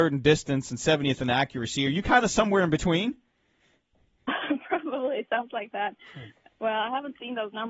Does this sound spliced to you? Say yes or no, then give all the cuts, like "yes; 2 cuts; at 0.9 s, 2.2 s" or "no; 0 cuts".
no; 0 cuts